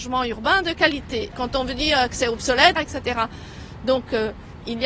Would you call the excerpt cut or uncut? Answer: cut